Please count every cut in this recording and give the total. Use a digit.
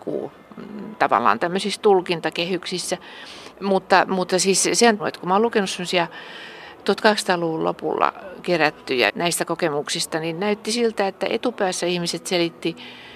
3